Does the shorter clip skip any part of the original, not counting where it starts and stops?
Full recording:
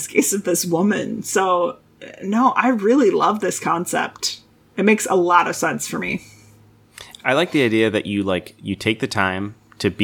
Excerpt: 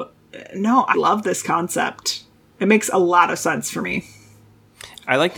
yes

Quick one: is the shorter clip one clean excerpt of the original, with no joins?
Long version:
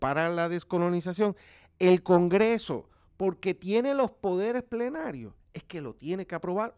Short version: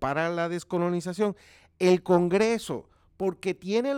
yes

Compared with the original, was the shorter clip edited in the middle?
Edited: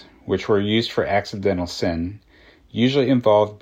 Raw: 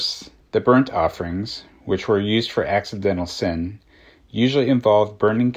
no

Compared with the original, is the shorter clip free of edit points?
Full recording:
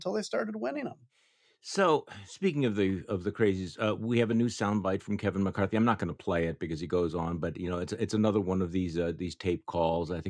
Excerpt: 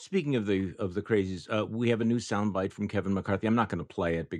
yes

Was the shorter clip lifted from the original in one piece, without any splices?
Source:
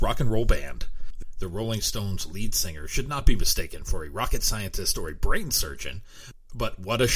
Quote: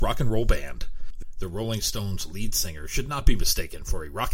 yes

